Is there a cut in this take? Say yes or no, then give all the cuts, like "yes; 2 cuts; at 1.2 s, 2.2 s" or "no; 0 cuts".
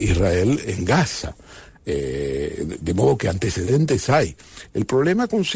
no; 0 cuts